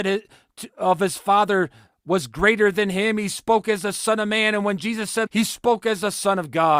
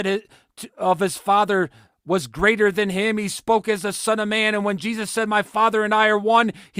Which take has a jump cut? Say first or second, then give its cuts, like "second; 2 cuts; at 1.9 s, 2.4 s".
first; 1 cut; at 5.3 s